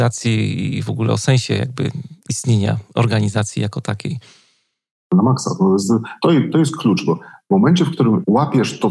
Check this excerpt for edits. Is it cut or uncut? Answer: uncut